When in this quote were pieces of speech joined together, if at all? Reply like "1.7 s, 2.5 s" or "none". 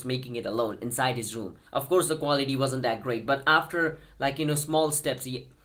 1.7 s

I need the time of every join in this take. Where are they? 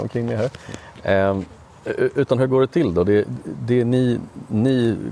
none

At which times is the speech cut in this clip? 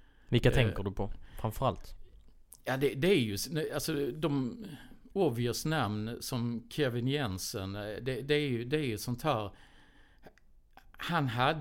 none

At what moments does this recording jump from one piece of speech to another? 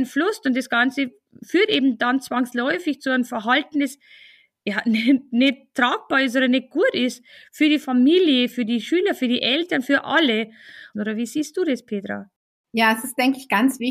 10.9 s

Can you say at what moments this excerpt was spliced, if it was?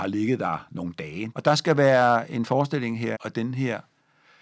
1.3 s, 3.1 s

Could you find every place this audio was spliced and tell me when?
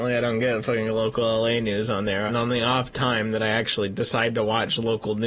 2.3 s

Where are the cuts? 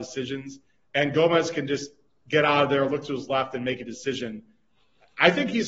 none

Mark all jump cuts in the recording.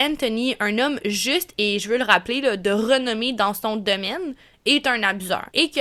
none

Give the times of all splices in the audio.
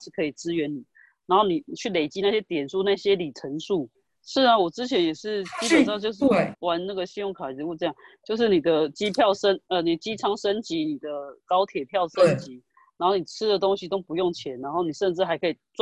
4.2 s, 6.5 s

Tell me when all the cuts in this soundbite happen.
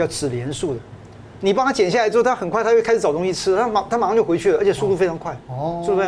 1.4 s

